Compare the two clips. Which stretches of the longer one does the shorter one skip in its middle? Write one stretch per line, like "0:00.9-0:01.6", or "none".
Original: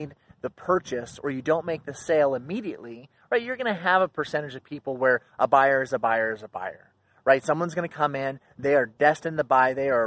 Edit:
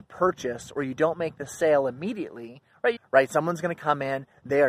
0:03.4-0:07.1